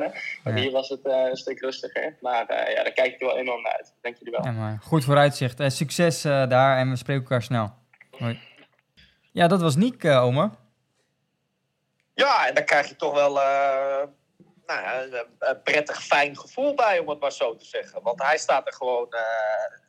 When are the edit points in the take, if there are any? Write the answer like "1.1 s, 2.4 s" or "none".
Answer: 8.1 s

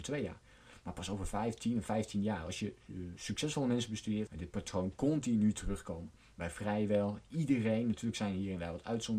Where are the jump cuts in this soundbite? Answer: 4.3 s

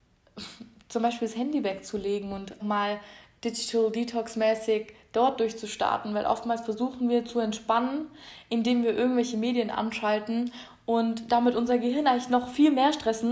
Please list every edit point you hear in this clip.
2.6 s

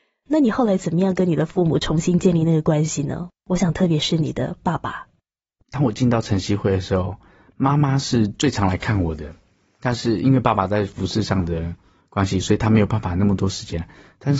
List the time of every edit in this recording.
none

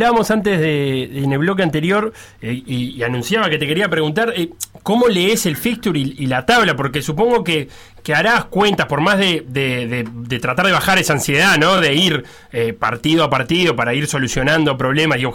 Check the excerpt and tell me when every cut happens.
none

